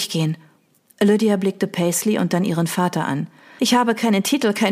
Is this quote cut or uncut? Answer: cut